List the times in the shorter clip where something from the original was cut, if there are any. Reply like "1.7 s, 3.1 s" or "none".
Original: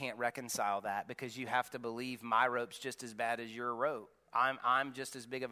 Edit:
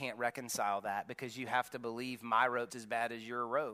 2.7 s